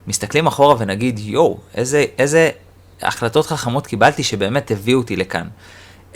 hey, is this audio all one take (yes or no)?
yes